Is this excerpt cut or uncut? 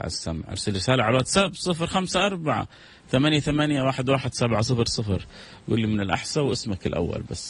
uncut